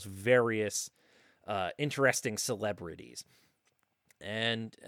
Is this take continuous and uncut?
yes; 0 cuts

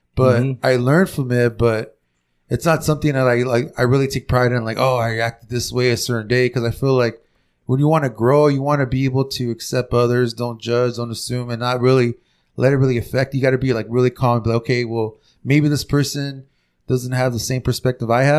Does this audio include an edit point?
no; 0 cuts

